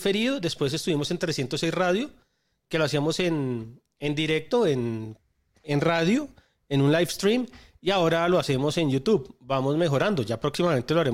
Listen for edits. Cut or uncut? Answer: uncut